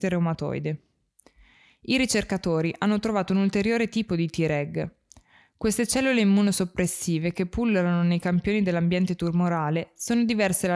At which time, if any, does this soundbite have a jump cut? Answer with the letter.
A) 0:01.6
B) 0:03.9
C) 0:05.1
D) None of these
D